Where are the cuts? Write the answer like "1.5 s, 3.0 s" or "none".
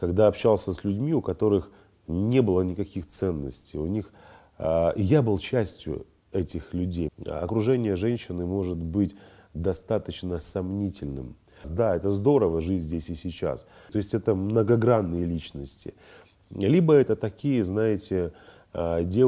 7.1 s, 11.6 s, 13.9 s